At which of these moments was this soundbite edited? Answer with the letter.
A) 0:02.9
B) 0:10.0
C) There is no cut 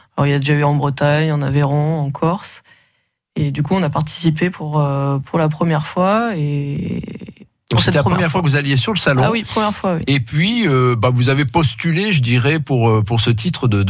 C